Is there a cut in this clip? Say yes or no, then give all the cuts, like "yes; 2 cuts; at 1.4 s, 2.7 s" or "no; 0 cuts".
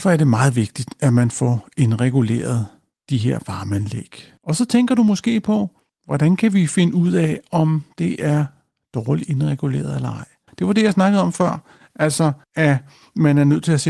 yes; 3 cuts; at 4.4 s, 10.5 s, 12.4 s